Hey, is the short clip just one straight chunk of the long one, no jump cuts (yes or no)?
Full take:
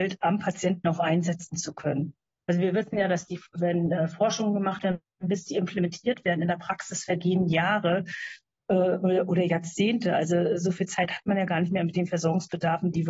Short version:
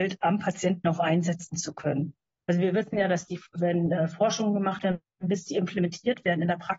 yes